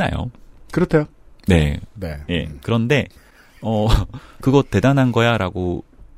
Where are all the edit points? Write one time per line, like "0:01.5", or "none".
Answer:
0:01.9
0:04.4